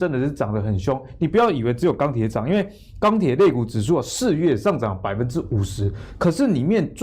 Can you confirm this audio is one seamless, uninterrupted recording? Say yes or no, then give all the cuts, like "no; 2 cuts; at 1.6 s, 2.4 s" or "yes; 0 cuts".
yes; 0 cuts